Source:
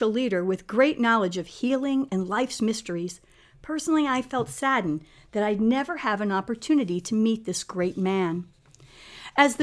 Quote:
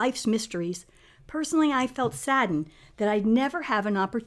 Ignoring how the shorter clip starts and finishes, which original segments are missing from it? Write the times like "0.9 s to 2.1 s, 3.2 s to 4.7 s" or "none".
none